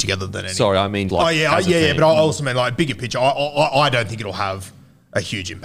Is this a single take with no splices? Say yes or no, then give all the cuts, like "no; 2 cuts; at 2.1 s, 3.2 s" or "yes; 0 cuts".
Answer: no; 1 cut; at 1.1 s